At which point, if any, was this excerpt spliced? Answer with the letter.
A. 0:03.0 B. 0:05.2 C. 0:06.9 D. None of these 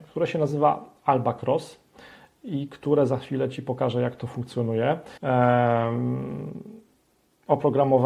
B